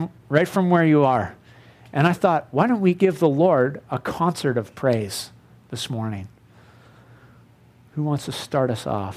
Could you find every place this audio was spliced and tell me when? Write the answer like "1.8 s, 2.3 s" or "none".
none